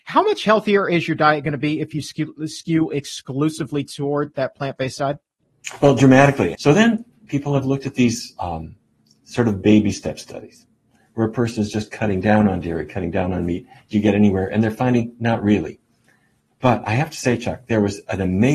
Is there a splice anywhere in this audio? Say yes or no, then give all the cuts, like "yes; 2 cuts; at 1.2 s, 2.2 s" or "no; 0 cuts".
yes; 1 cut; at 6.5 s